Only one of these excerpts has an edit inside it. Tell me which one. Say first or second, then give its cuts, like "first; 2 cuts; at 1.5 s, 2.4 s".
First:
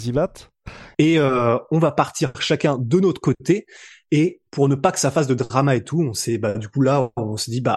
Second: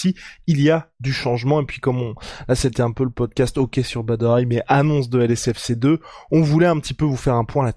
first; 1 cut; at 0.9 s